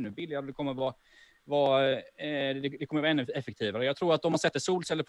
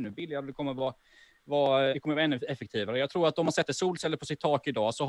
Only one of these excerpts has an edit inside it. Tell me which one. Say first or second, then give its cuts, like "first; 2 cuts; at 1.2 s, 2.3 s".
second; 1 cut; at 1.9 s